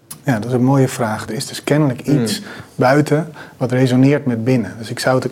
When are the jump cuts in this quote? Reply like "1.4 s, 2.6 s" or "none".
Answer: 1.3 s